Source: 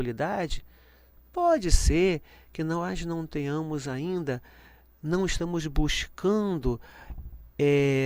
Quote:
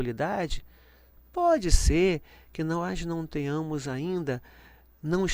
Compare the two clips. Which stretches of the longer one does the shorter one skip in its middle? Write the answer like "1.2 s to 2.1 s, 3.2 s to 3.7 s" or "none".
none